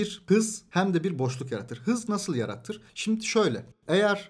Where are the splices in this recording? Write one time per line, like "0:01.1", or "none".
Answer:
0:02.9